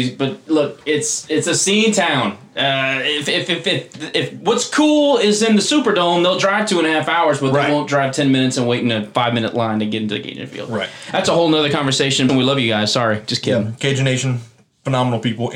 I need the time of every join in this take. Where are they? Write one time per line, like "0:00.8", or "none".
0:12.3